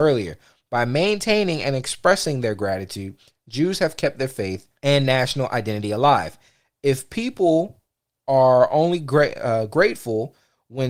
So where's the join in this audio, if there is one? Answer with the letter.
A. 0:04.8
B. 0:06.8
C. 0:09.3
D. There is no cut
A